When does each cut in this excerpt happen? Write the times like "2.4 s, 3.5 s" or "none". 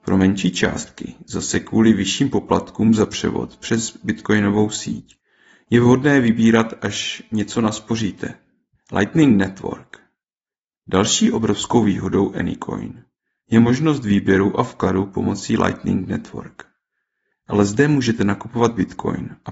17.3 s